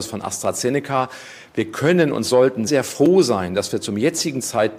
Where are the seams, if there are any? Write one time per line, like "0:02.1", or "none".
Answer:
0:02.7